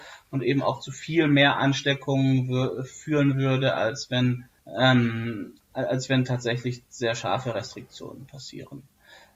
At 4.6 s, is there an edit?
yes; 1 cut; at 4.6 s

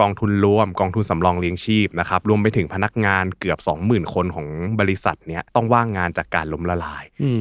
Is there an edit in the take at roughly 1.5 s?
no; 1 cut; at 5.5 s

